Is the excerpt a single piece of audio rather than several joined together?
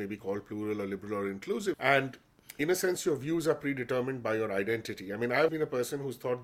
no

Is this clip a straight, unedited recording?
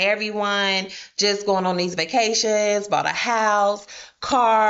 yes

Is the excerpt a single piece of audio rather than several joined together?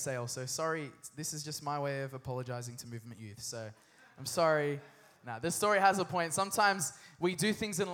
yes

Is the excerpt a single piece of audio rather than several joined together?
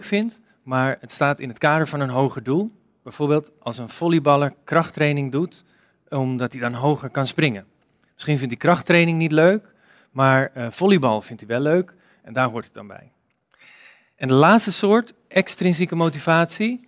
yes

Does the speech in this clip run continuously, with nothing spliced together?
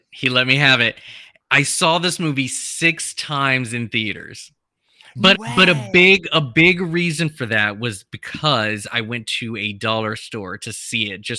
no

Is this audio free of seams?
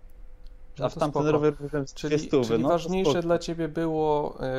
yes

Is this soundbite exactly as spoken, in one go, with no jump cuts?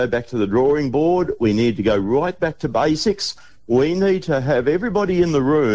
yes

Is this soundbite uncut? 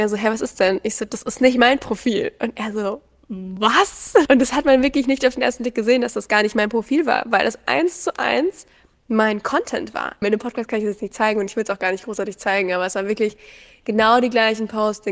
no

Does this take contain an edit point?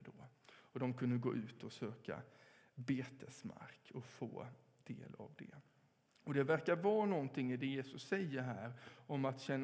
no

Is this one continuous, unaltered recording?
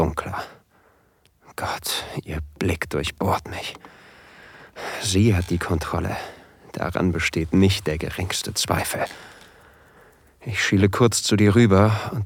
yes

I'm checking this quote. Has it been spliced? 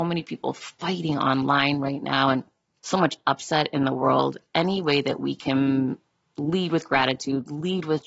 no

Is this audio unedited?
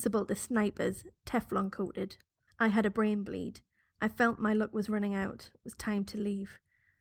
no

